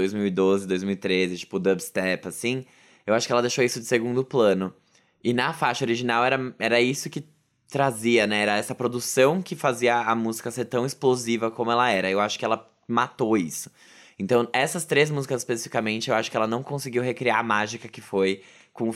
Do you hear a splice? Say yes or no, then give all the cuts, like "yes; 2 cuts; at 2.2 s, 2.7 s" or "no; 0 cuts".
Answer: no; 0 cuts